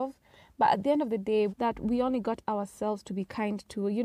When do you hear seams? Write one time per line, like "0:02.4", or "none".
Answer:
0:01.5